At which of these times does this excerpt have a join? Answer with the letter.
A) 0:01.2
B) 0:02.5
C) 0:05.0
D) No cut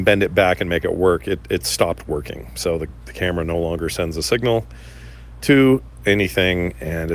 D